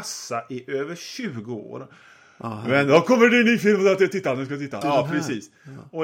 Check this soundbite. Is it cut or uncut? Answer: cut